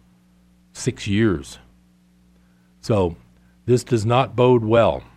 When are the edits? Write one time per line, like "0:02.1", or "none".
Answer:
none

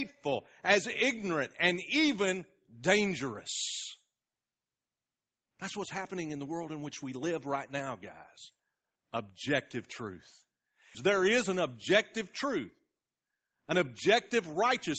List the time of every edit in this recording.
0:09.0
0:10.9

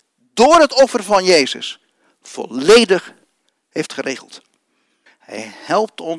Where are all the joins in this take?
0:05.1

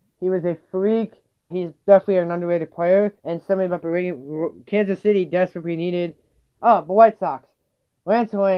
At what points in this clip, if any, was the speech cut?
0:01.5
0:03.2
0:06.5

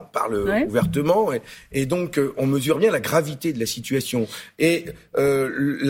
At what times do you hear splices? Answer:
none

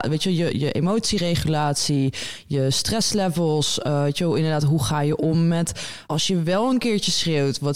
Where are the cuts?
0:06.0

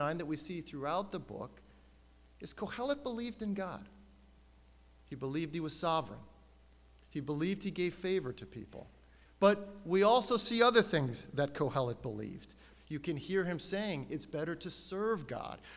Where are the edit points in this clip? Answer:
0:09.3
0:12.7

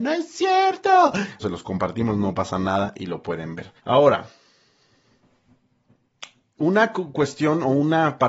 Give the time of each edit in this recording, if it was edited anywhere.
0:01.4
0:03.8

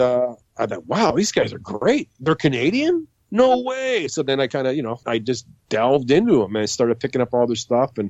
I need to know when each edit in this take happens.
0:05.0

